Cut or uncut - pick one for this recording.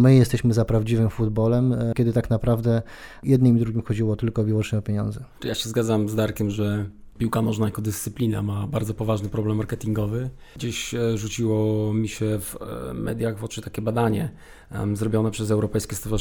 uncut